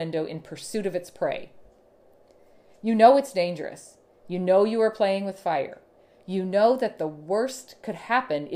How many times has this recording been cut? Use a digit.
0